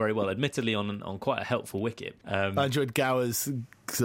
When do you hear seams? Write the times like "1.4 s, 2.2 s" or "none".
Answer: 2.2 s